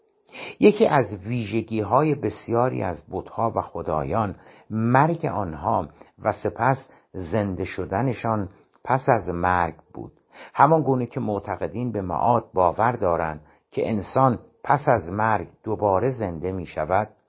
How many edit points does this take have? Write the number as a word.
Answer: zero